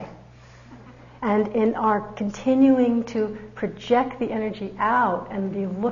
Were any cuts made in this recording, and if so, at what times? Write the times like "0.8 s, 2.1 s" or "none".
1.2 s